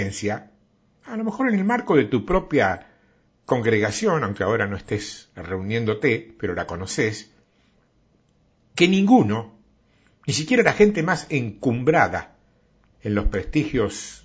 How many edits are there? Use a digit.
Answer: 0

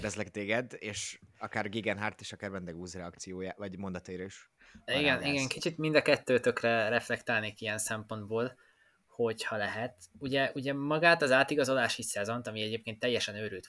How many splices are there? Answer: 0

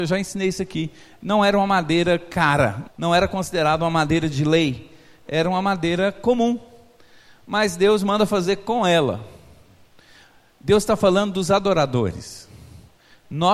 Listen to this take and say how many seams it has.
1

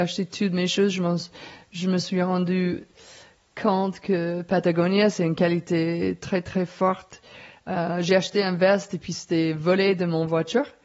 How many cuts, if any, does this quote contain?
0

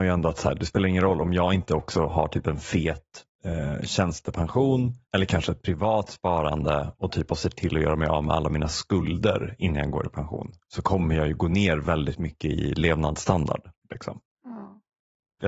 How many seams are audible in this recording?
1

